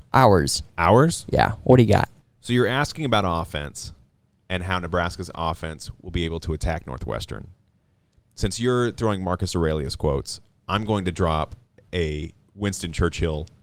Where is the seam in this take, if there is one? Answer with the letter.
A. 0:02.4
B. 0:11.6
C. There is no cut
C